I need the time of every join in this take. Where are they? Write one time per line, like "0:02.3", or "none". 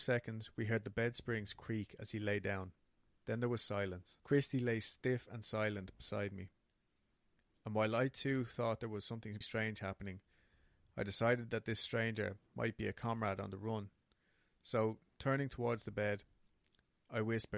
0:04.2
0:09.4